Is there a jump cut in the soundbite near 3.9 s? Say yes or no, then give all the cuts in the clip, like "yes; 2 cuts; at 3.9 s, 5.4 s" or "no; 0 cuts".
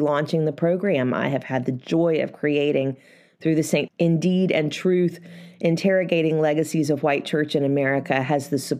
yes; 1 cut; at 3.9 s